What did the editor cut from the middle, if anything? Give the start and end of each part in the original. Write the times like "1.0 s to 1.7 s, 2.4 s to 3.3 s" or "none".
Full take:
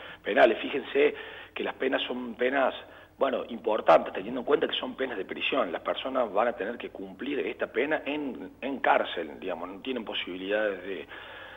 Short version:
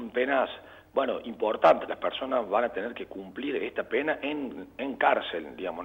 4.1 s to 5.7 s